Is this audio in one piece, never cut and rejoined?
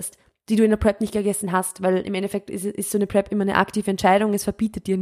yes; 0 cuts

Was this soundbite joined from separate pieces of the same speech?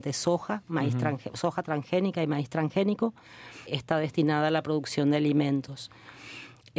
yes; 1 cut; at 3.7 s

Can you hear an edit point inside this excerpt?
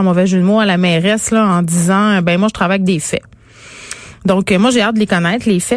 no; 0 cuts

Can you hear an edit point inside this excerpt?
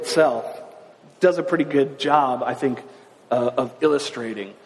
no; 0 cuts

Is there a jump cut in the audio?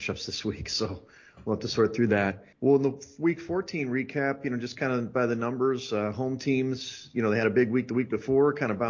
yes; 1 cut; at 2.5 s

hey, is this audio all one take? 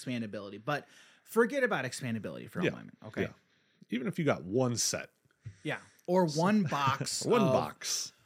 yes; 0 cuts

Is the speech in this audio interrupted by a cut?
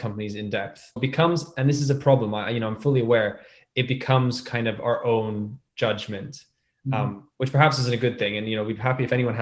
yes; 1 cut; at 1.0 s

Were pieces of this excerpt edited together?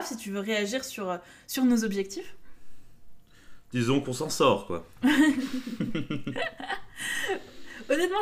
no; 0 cuts

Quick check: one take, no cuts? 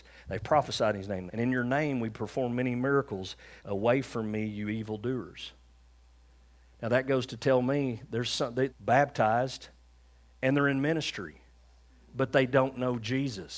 no; 3 cuts; at 1.3 s, 3.6 s, 8.7 s

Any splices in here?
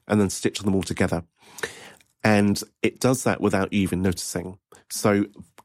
no; 0 cuts

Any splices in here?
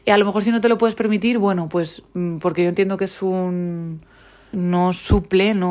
yes; 1 cut; at 4.5 s

